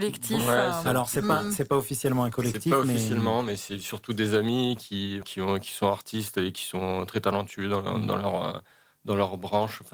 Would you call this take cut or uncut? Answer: cut